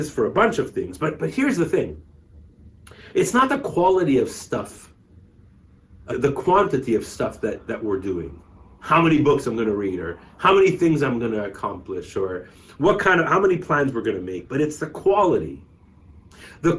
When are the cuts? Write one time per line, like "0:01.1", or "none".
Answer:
0:06.1